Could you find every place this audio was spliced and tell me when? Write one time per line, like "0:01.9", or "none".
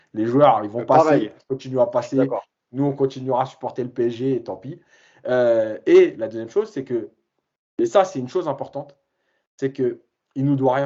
none